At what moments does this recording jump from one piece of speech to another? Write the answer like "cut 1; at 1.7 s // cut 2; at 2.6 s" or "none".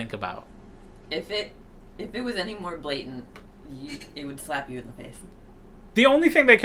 none